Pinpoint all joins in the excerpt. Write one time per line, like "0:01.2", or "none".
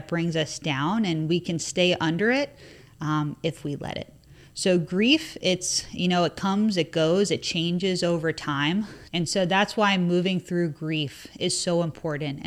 0:09.1